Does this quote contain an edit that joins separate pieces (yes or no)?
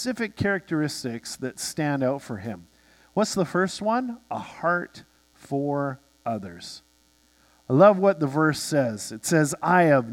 no